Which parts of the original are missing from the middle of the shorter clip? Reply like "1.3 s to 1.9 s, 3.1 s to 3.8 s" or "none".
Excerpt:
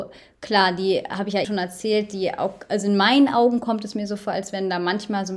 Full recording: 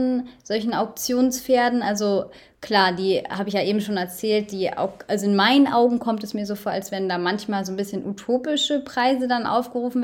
3.6 s to 3.8 s